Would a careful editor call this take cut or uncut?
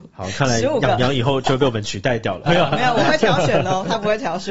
cut